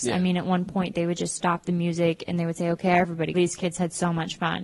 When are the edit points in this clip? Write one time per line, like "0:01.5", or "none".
0:03.3